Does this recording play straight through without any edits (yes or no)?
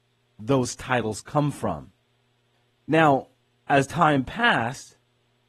no